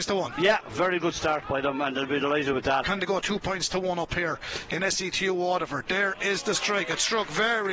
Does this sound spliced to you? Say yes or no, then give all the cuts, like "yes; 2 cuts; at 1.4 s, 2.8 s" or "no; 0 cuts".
yes; 1 cut; at 2.8 s